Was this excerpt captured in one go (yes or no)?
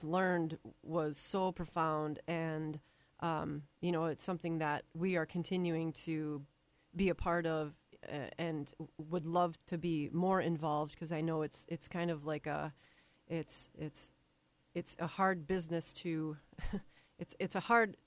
no